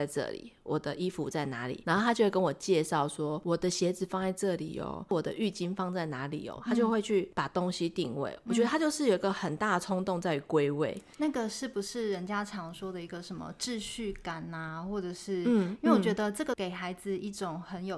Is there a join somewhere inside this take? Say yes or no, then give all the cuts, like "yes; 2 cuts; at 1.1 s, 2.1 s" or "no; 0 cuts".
no; 0 cuts